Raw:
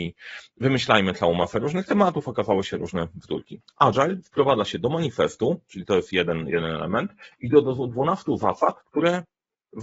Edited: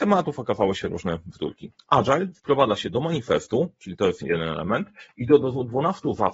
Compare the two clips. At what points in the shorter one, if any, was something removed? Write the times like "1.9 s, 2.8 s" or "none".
4.2 s